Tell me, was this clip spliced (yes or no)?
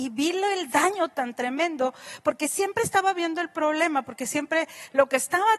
no